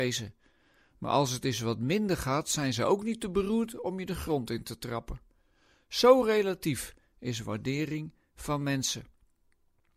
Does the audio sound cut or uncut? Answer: uncut